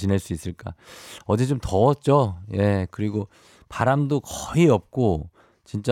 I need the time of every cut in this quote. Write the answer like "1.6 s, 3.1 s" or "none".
none